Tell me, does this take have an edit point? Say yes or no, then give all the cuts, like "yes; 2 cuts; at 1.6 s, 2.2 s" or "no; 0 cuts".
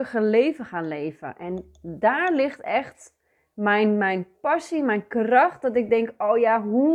no; 0 cuts